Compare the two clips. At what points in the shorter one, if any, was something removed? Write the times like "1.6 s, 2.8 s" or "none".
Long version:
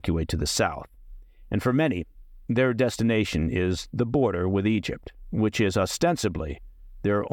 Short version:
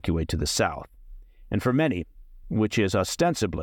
2.4 s